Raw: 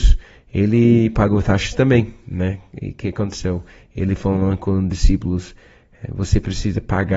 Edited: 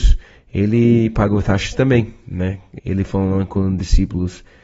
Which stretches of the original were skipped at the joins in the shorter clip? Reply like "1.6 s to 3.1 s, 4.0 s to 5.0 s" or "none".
2.8 s to 3.9 s